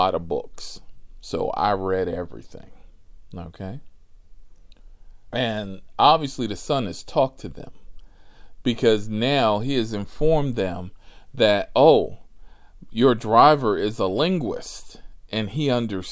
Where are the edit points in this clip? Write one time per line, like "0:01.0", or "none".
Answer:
0:05.3